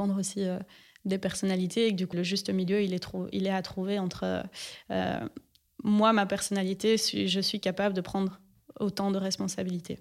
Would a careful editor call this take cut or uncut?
cut